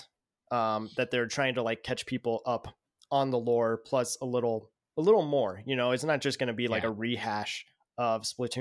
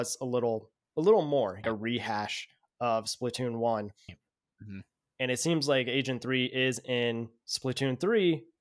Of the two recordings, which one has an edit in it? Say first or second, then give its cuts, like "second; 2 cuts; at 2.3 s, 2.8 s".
second; 2 cuts; at 1.6 s, 4.1 s